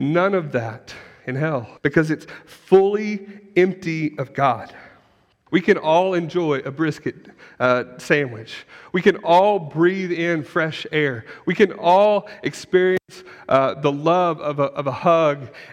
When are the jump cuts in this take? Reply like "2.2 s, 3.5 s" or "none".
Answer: 1.8 s, 5.5 s